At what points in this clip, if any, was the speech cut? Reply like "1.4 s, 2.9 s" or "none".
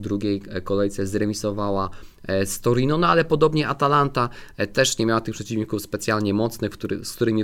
none